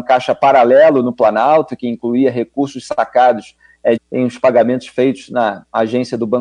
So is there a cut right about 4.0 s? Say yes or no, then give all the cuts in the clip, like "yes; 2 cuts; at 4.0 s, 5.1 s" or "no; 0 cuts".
yes; 1 cut; at 4.0 s